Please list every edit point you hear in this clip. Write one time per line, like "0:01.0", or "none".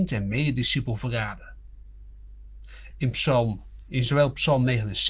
0:02.9